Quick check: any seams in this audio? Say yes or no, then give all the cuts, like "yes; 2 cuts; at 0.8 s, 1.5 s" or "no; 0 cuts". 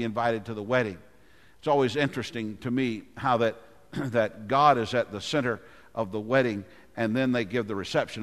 no; 0 cuts